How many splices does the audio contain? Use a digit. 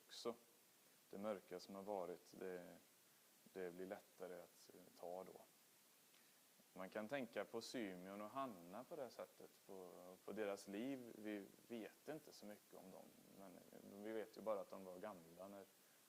1